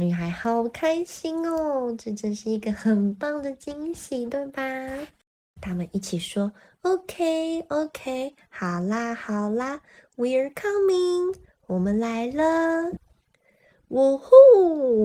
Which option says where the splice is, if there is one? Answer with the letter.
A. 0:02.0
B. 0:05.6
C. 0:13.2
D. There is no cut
B